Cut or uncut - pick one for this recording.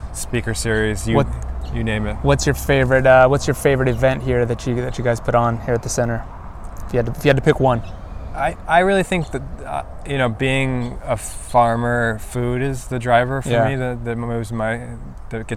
uncut